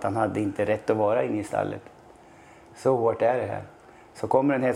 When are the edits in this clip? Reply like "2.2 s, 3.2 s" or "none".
none

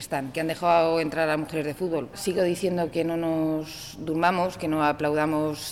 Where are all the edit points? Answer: 2.1 s

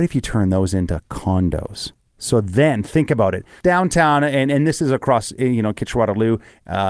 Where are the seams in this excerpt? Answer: 3.6 s

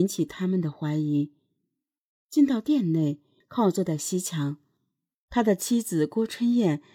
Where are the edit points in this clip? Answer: 3.4 s

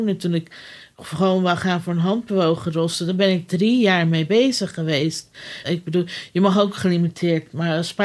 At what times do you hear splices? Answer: 5.6 s

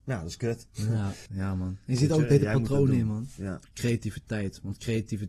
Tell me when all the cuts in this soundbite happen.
1.3 s, 3.7 s

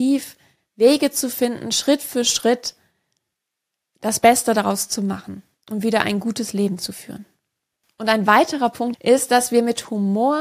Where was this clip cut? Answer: 8.9 s

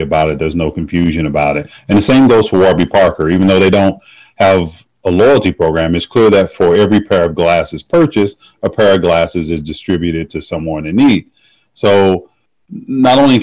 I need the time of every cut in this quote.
none

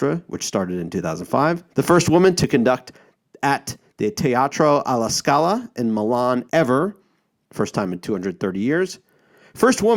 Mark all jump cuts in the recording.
1.7 s, 6.5 s

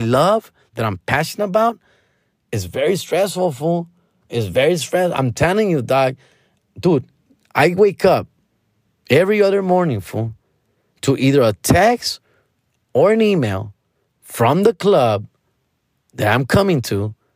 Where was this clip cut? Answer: none

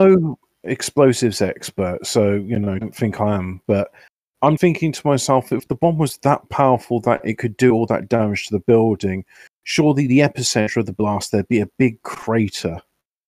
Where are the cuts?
2.8 s, 4.6 s

